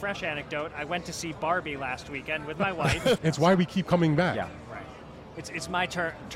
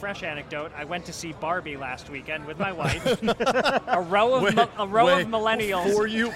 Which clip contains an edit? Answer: first; 2 cuts; at 3.2 s, 5.3 s

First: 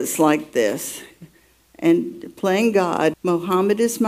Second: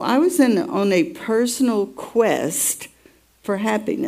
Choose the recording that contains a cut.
first; 1 cut; at 3.1 s

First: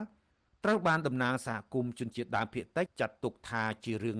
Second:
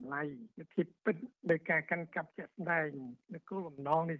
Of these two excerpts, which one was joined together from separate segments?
first; 1 cut; at 2.9 s

